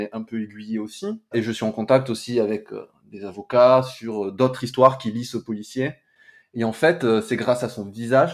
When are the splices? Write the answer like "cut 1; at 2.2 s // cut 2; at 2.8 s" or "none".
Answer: cut 1; at 1.3 s // cut 2; at 6.4 s